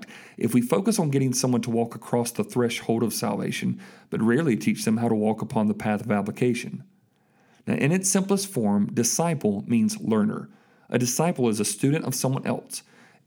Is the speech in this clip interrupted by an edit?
no; 0 cuts

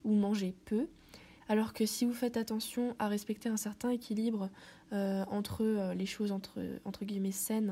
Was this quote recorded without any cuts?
no; 1 cut; at 1.4 s

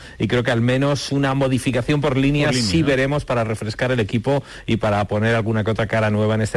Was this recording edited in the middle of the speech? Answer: no; 0 cuts

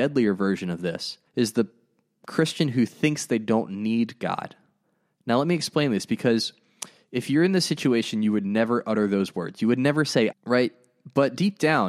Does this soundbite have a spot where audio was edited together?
yes; 2 cuts; at 1.3 s, 10.3 s

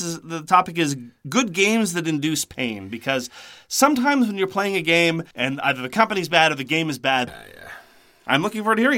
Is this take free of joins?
no; 2 cuts; at 5.3 s, 7.3 s

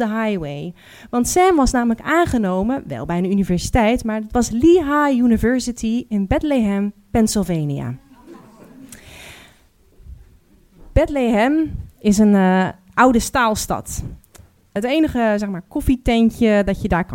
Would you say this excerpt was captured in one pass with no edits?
yes; 0 cuts

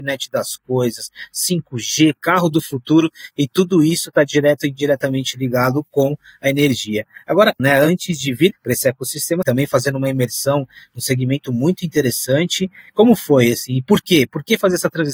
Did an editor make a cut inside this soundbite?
yes; 2 cuts; at 7.6 s, 9.4 s

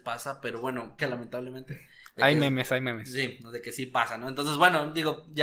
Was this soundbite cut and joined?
yes; 1 cut; at 1.0 s

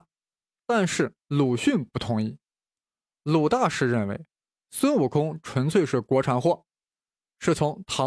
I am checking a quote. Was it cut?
no; 0 cuts

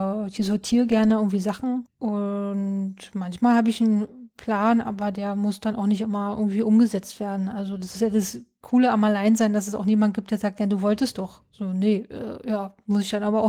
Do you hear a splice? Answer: yes; 1 cut; at 1.9 s

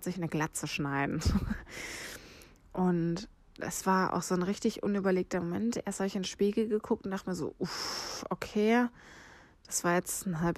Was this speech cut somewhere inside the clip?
no; 0 cuts

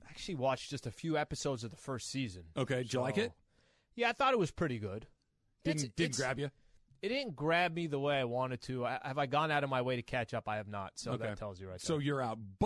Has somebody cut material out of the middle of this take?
no; 0 cuts

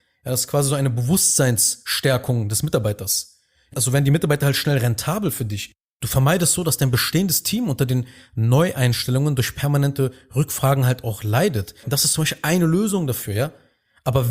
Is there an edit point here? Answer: yes; 2 cuts; at 3.7 s, 11.8 s

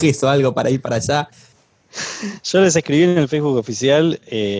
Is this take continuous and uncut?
yes; 0 cuts

